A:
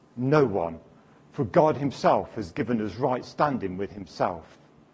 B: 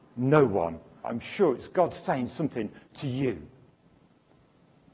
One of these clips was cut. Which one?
B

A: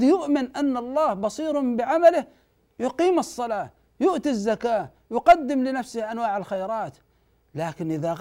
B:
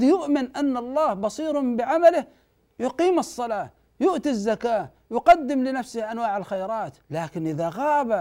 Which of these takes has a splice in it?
B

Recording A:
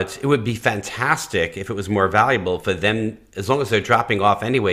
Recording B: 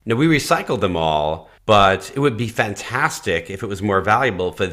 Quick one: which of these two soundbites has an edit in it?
B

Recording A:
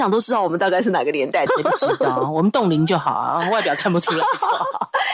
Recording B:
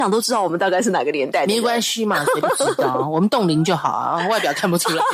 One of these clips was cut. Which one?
A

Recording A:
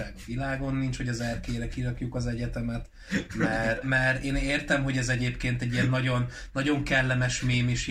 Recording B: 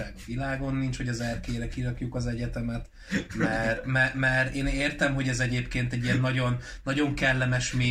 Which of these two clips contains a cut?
A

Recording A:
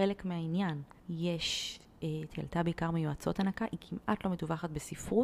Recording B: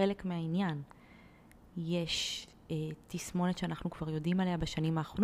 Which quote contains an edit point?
A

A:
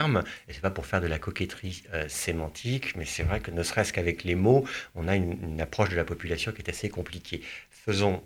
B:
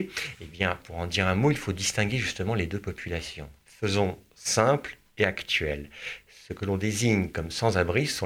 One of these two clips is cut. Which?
B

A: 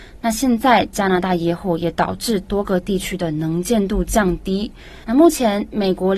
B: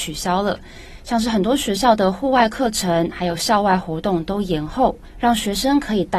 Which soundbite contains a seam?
A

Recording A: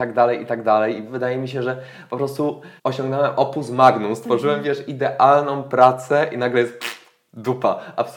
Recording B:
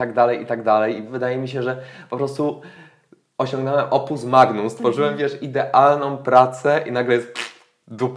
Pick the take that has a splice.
A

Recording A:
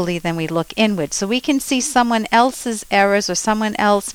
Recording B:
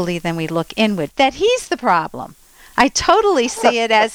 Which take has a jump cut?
B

